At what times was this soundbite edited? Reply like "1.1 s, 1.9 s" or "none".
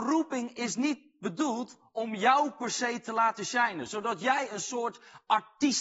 none